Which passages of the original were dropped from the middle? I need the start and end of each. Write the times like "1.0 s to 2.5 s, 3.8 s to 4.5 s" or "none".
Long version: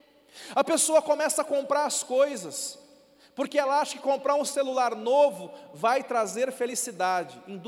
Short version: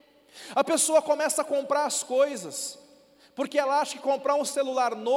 none